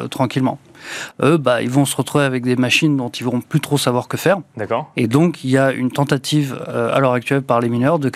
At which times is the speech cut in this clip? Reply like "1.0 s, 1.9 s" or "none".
1.1 s